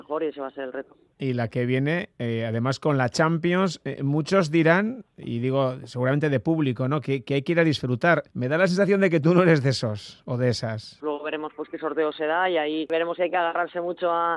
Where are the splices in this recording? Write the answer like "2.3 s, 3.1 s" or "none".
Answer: 8.3 s, 11.0 s